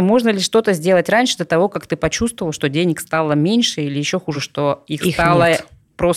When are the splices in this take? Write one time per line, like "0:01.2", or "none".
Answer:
none